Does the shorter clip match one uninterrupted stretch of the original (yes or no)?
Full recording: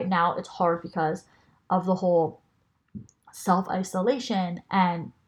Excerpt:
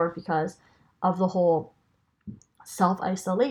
yes